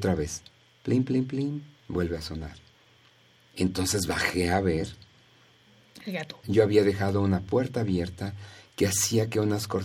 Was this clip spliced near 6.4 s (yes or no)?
yes